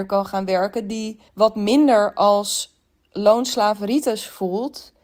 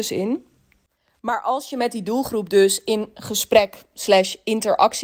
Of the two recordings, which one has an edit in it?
first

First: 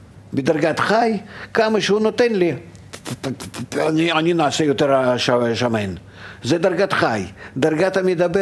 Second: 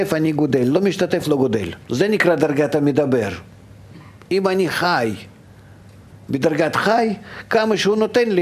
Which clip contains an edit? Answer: second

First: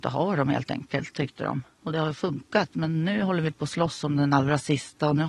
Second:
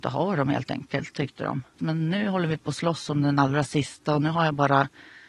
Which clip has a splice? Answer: second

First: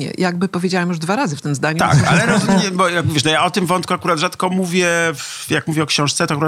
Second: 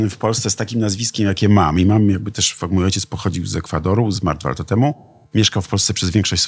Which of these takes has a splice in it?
first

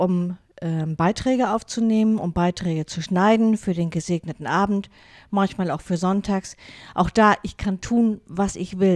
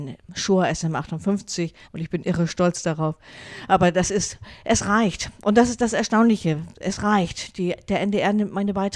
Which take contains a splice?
second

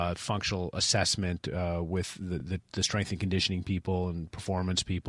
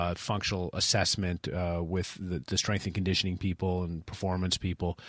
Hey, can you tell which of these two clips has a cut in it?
second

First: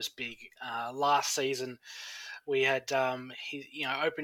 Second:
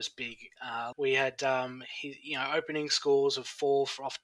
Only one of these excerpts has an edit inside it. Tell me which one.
second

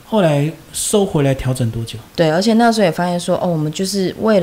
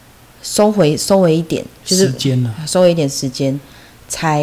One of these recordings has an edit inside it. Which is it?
first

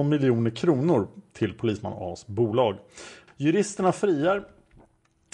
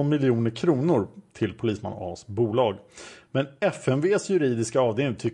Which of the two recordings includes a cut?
first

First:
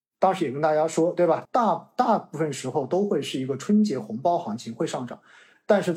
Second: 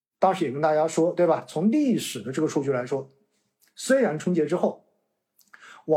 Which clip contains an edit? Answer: first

